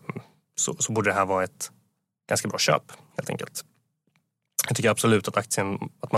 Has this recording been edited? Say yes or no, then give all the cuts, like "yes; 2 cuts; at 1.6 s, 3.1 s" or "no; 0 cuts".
no; 0 cuts